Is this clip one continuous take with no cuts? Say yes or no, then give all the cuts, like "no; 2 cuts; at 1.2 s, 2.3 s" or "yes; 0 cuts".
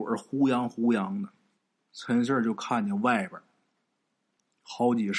no; 1 cut; at 1.8 s